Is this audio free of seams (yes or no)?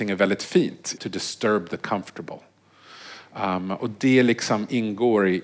no